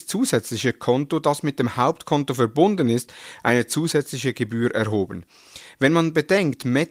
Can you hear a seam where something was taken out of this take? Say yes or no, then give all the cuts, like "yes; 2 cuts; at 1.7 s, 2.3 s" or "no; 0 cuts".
no; 0 cuts